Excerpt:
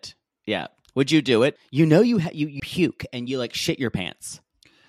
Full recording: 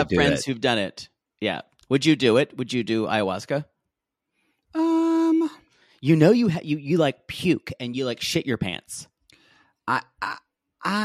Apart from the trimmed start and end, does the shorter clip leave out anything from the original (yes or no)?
yes